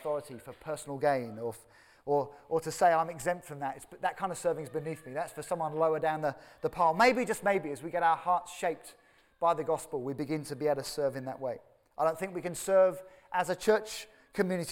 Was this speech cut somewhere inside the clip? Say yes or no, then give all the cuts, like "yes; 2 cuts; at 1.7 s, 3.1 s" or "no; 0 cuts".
no; 0 cuts